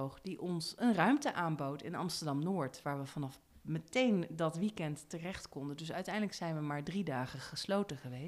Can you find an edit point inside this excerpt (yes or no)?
no